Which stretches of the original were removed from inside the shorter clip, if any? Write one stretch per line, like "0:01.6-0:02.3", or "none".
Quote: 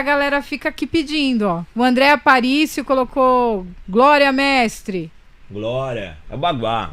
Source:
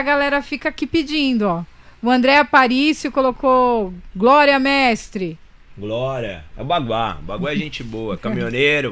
0:01.7-0:02.0